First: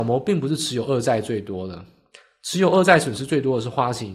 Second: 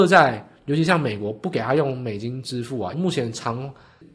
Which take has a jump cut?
second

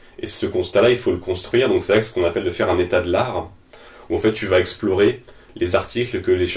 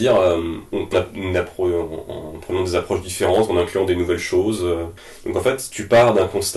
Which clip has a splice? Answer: second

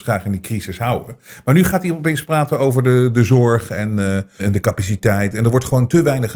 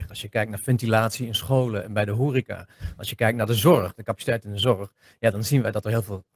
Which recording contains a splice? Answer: first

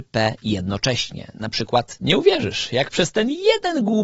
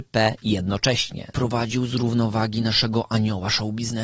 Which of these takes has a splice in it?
second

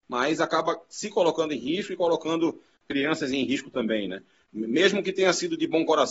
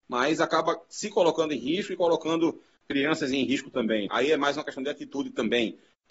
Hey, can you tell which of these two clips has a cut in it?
second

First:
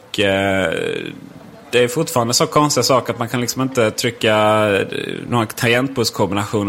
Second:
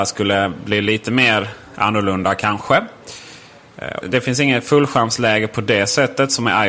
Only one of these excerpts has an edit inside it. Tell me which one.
second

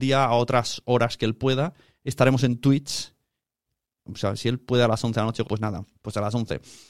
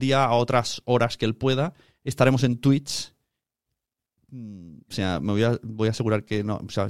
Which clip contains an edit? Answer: first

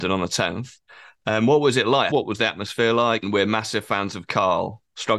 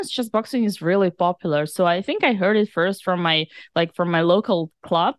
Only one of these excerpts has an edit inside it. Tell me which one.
first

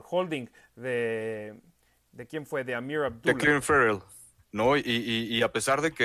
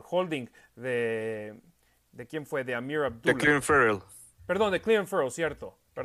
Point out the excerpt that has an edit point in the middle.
first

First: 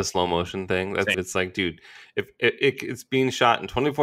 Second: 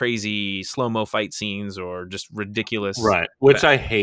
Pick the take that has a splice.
first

